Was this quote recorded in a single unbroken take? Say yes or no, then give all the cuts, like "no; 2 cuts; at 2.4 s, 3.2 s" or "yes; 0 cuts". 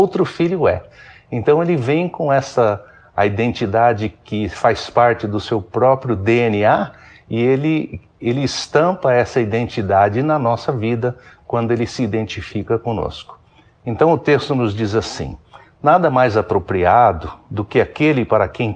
yes; 0 cuts